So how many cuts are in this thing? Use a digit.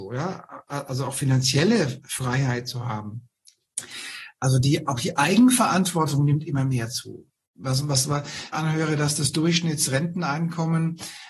1